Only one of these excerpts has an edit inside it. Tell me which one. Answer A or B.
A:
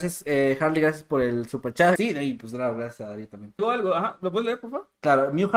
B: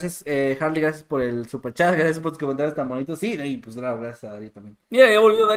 A